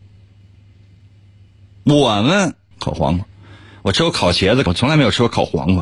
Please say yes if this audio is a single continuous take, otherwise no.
no